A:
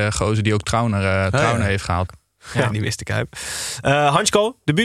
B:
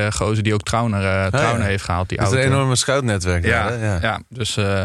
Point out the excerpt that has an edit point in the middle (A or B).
A